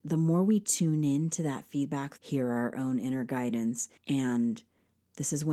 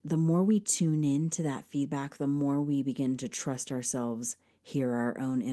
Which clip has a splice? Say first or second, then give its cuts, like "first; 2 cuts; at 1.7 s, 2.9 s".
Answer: first; 2 cuts; at 2.2 s, 4.0 s